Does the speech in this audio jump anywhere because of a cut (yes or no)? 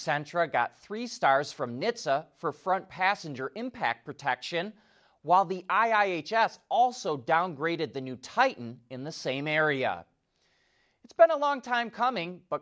no